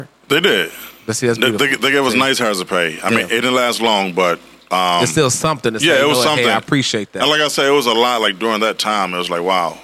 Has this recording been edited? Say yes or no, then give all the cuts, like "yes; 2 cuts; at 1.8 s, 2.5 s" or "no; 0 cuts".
no; 0 cuts